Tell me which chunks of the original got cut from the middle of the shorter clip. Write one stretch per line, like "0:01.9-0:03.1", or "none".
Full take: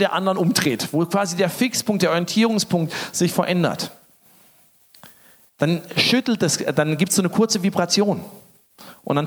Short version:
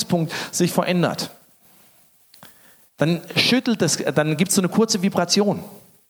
none